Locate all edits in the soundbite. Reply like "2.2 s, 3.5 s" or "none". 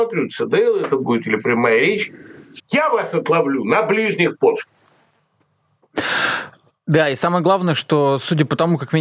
2.6 s